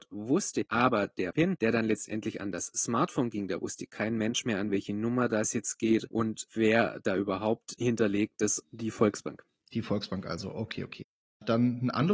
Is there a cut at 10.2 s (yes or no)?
no